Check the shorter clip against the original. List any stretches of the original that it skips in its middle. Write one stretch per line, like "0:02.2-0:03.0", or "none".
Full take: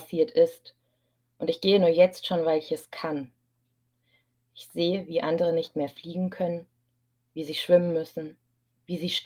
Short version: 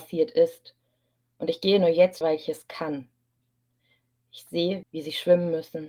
0:02.2-0:02.4
0:05.1-0:07.3

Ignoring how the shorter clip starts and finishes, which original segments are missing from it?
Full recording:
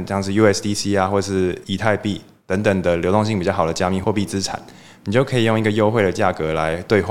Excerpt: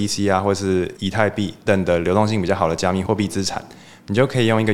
0:02.3-0:02.6

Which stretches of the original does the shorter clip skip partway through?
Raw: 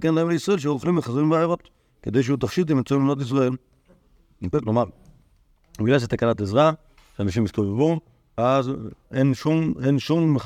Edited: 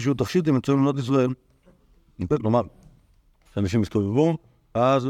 0:05.7-0:07.1

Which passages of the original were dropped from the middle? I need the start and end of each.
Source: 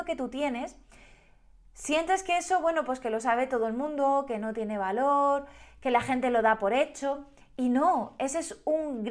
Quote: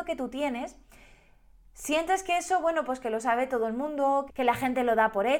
0:04.3-0:05.7

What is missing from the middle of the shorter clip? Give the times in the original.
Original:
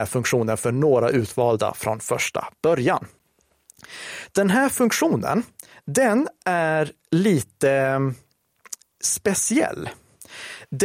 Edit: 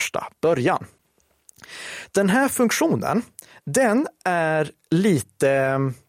none

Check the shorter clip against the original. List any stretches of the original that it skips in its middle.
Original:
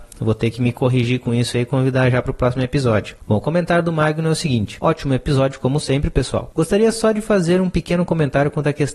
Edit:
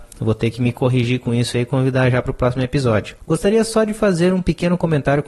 0:03.2-0:06.5

